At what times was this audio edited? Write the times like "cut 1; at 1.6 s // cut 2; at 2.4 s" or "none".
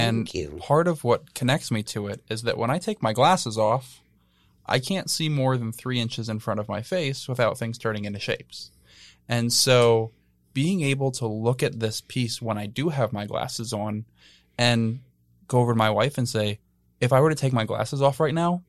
none